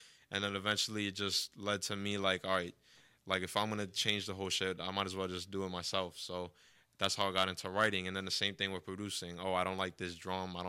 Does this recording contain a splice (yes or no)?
no